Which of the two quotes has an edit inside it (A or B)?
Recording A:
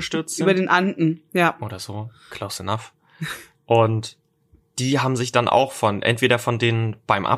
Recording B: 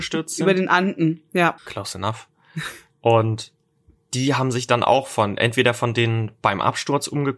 B